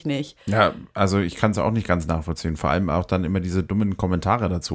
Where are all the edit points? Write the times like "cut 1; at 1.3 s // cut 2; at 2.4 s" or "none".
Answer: none